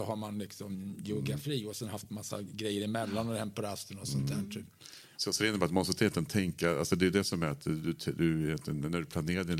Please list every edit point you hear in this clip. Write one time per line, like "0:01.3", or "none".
0:05.2